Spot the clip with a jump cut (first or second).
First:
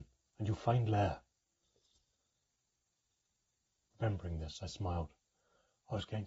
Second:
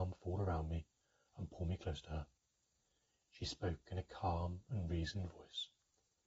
first